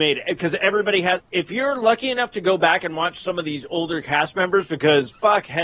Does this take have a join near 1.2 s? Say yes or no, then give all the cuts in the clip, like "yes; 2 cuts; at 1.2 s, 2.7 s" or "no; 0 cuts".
yes; 1 cut; at 1.2 s